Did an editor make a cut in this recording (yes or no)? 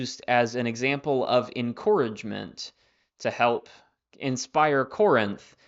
no